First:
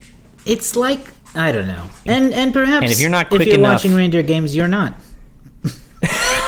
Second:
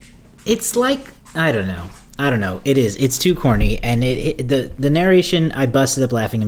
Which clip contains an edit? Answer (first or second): first